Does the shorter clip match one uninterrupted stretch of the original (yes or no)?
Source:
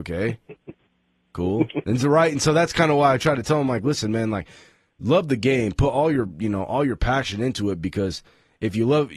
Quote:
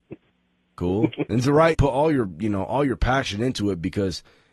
no